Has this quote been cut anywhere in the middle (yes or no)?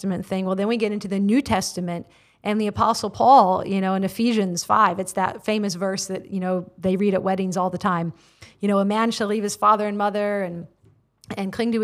no